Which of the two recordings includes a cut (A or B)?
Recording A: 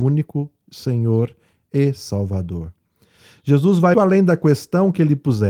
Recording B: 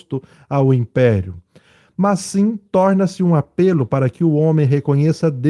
A